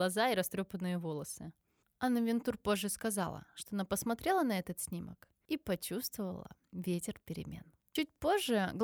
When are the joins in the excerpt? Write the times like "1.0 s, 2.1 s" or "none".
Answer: none

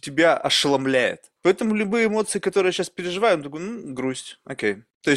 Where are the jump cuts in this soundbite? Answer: 1.4 s

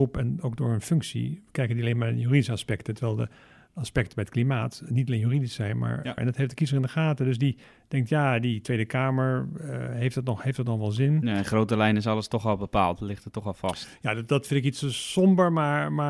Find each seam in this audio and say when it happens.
6.2 s

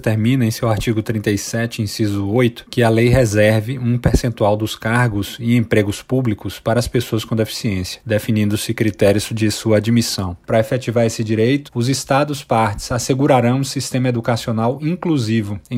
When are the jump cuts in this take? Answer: 10.4 s, 11.7 s

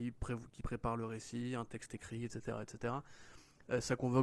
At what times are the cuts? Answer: none

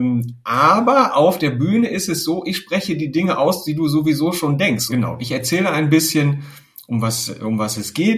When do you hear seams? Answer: 4.9 s

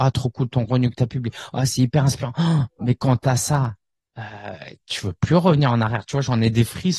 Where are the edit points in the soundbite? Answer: none

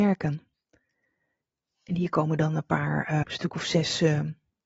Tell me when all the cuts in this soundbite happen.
1.6 s, 3.2 s

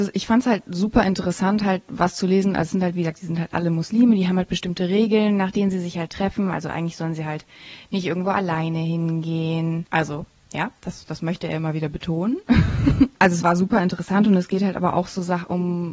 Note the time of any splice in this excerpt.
9.8 s, 13.4 s

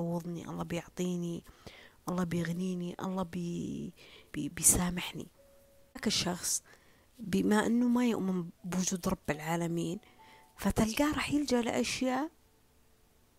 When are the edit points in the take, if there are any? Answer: 4.3 s, 8.6 s

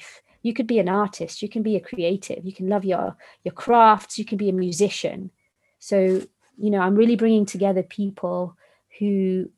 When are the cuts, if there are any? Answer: 5.8 s

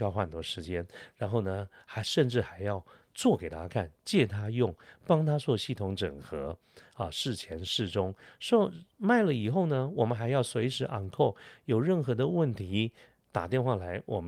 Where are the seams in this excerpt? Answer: none

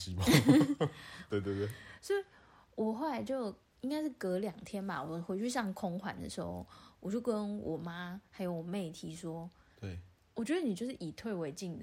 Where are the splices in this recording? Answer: 1.3 s, 9.7 s

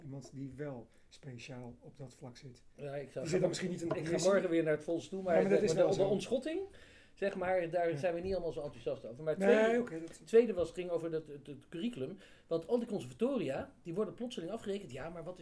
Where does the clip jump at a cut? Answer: none

